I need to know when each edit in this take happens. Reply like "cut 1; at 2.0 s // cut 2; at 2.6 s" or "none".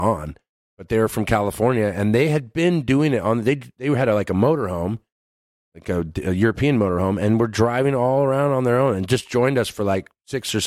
none

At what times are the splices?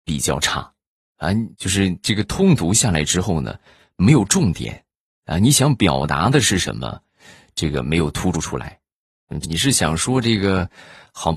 cut 1; at 1.5 s // cut 2; at 8.3 s // cut 3; at 9.4 s

